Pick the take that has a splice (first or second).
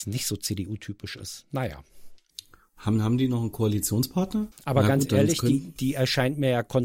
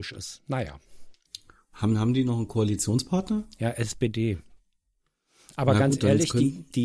first